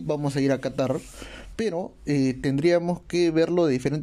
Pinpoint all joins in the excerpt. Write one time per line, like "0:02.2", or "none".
none